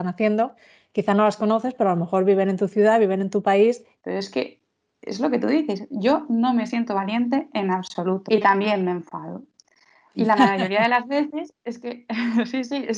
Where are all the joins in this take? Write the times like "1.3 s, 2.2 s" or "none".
4.0 s

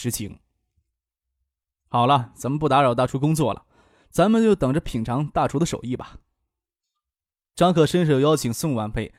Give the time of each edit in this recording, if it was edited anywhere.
none

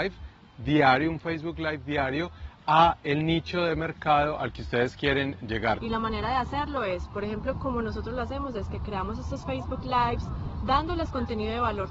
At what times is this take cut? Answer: 5.8 s

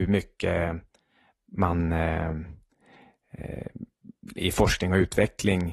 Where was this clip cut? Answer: 4.4 s

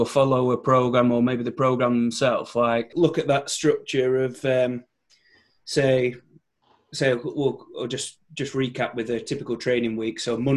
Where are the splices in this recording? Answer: 2.9 s

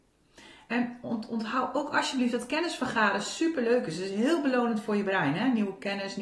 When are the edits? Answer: none

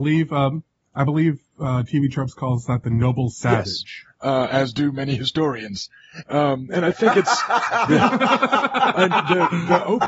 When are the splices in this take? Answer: none

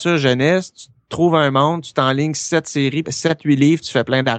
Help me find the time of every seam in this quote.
3.0 s

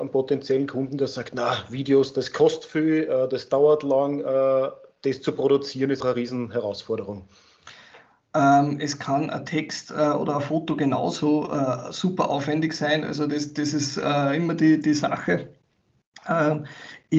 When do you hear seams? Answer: 6.0 s

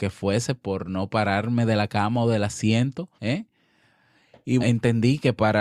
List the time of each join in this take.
3.2 s, 4.6 s

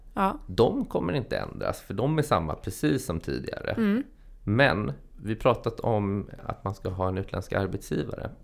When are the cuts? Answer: none

